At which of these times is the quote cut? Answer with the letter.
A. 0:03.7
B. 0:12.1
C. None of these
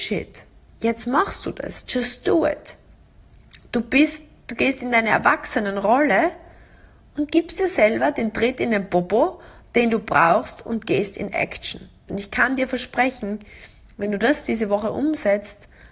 B